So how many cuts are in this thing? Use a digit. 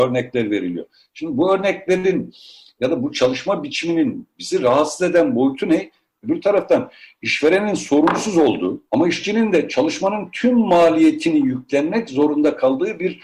2